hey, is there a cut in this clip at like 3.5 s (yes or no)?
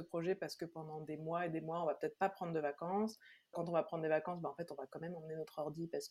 yes